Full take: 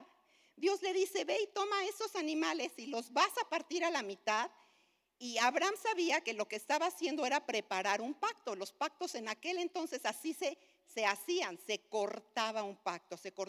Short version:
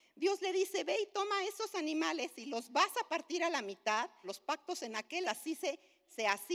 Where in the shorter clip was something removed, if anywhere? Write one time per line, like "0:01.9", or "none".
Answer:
0:04.2
0:05.2